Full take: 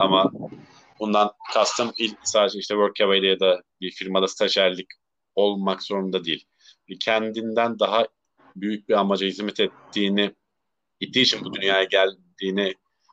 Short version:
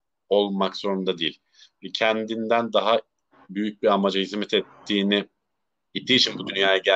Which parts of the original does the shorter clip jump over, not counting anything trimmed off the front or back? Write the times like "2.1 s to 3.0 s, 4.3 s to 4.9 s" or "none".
none